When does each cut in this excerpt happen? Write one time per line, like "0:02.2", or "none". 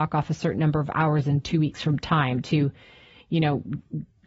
none